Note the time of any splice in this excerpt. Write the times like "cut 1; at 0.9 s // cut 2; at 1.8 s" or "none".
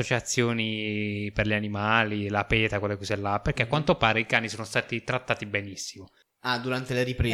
none